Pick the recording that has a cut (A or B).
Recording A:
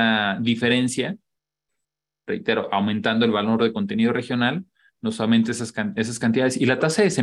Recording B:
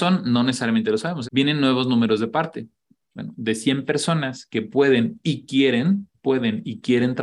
B